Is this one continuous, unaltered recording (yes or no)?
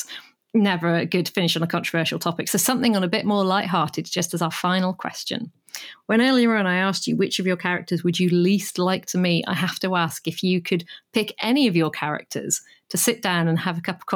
yes